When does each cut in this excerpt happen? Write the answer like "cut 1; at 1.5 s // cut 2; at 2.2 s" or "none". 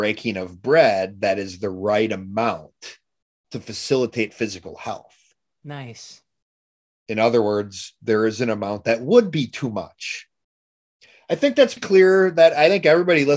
cut 1; at 11.8 s